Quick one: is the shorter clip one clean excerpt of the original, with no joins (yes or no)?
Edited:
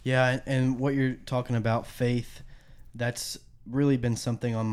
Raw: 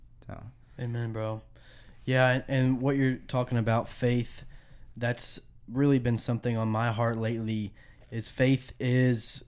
yes